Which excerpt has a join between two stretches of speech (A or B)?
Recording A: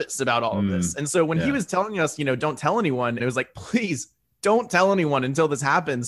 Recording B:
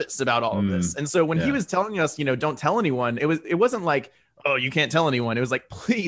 A